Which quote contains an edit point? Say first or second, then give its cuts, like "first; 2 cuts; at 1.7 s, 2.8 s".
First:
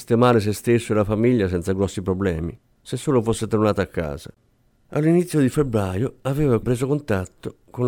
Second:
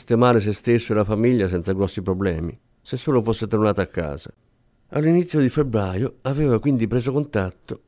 first; 1 cut; at 6.6 s